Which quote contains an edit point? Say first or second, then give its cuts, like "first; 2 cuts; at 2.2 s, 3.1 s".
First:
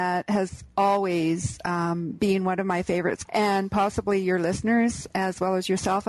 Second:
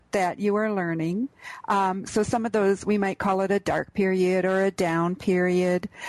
first; 1 cut; at 3.3 s